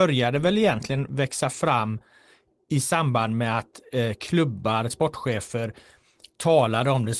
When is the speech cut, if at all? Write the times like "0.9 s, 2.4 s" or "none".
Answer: 4.9 s